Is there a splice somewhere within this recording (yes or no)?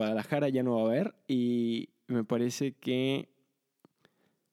no